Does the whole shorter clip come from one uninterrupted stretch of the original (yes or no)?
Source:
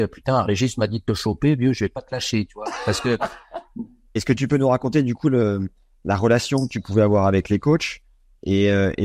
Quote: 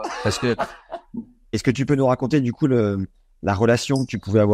yes